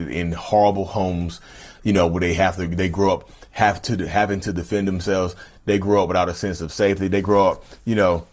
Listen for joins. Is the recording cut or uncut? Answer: uncut